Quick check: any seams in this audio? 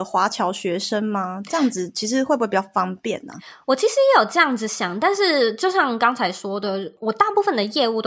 no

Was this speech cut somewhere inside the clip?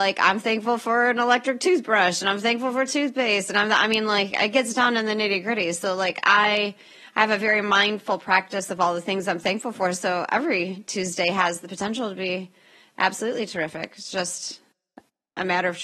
no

